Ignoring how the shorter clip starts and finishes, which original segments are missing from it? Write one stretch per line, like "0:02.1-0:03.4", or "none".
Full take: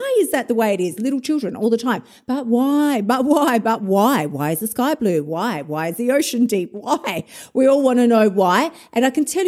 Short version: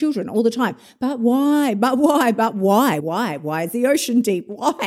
0:04.3-0:05.2